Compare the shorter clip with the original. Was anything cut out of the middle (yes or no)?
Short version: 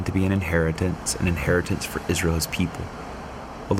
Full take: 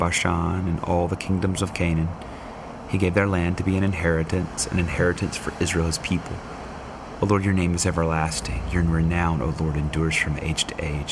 no